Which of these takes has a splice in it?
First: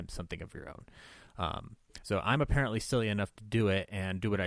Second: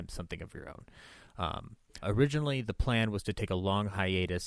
second; 1 cut; at 2.0 s

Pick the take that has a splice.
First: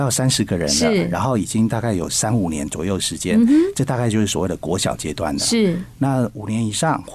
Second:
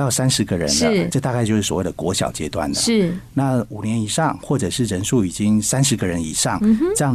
second; 1 cut; at 1.1 s

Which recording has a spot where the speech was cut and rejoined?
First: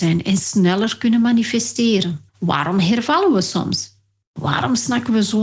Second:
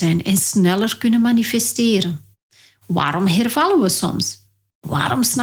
first; 1 cut; at 2.3 s

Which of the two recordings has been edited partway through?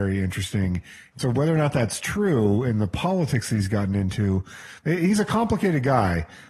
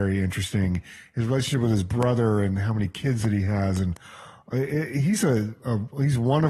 first; 1 cut; at 1.1 s

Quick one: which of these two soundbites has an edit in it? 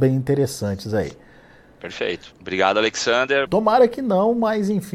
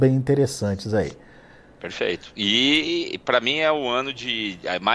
first; 2 cuts; at 2.3 s, 3.5 s

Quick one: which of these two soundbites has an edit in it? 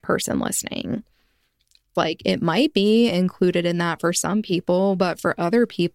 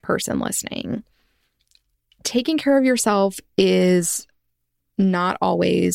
first; 1 cut; at 2.0 s

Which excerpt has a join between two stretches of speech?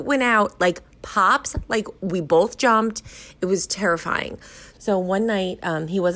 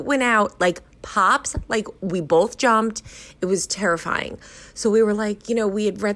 first; 1 cut; at 4.7 s

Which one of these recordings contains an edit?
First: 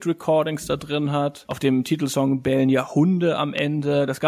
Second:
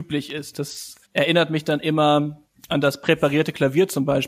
second; 1 cut; at 1.0 s

